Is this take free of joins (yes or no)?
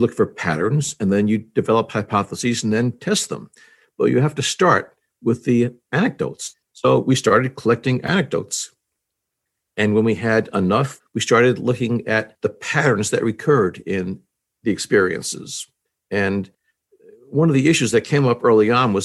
no